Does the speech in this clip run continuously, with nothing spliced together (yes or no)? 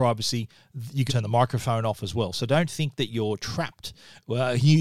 no